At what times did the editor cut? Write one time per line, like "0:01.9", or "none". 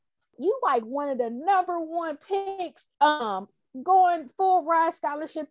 0:02.9